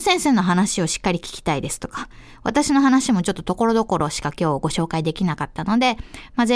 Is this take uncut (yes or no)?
yes